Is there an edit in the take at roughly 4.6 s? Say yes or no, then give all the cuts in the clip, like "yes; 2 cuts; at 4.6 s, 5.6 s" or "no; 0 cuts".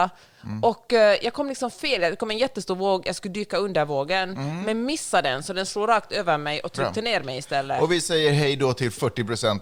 no; 0 cuts